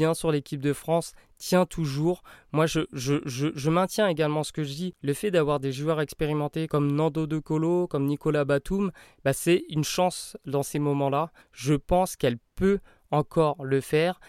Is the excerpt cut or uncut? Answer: cut